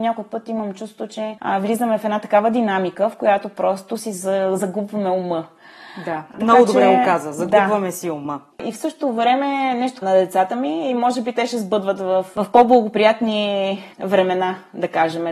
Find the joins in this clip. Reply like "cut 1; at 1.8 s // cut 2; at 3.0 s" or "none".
cut 1; at 8.5 s // cut 2; at 10.0 s